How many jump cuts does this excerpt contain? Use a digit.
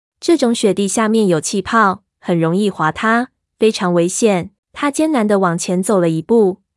1